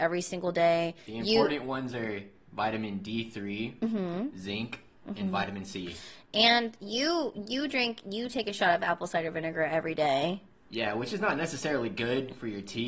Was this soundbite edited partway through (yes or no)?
no